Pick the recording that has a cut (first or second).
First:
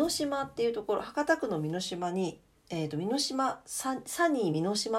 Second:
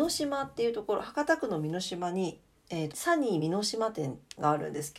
second